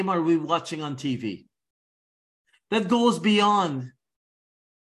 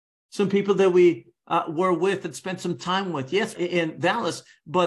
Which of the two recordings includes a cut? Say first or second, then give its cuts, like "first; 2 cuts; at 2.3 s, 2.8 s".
second; 1 cut; at 3.5 s